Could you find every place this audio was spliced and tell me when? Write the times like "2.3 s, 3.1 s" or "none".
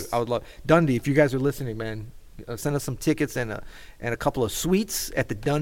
2.6 s